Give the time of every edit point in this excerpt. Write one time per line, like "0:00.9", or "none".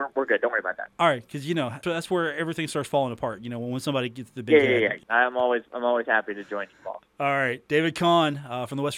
0:01.8
0:05.0